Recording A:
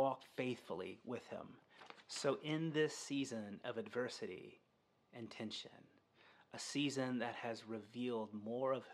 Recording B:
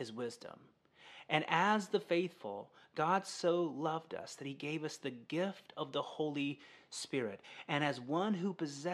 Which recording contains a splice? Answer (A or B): B